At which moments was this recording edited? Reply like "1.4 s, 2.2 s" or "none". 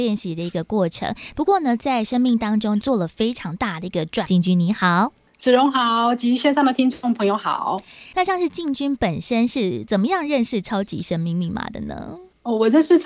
2.8 s, 4.2 s